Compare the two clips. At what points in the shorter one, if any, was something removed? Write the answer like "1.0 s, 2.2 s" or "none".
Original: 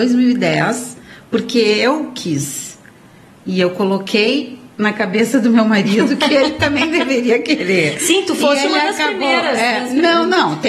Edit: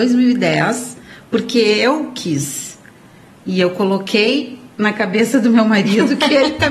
none